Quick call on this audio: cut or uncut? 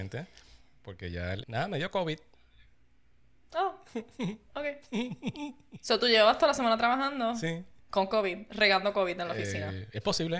cut